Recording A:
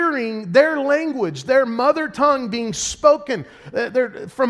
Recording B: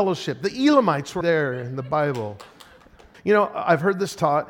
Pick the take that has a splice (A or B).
B